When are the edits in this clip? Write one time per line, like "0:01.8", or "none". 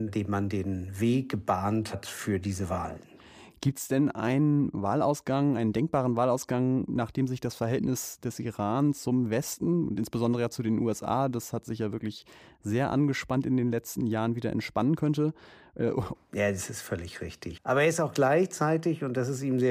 0:16.1
0:17.6